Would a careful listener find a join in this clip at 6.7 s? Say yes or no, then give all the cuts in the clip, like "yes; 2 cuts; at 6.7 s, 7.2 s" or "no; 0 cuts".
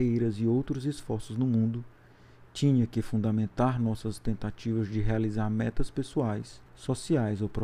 yes; 1 cut; at 6.7 s